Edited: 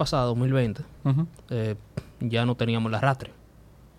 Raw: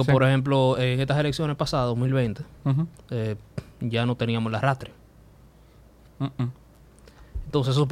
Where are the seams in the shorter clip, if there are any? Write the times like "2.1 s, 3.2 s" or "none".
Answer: none